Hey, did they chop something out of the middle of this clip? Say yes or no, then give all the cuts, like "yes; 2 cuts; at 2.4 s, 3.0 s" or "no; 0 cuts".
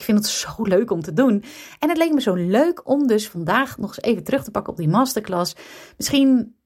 no; 0 cuts